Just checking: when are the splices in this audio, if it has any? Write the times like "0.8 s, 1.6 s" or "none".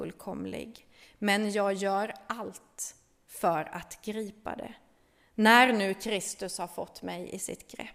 none